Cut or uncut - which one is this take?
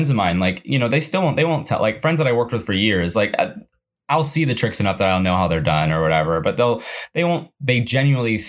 uncut